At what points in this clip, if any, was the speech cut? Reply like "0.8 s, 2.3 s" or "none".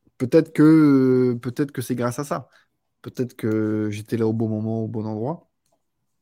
3.0 s